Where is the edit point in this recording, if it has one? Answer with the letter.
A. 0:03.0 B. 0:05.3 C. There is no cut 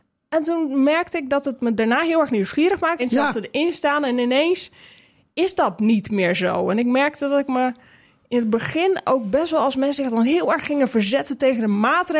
A